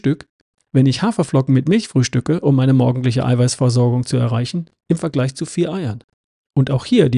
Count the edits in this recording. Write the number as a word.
zero